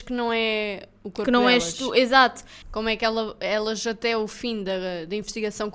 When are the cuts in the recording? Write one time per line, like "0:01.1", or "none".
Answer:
0:02.6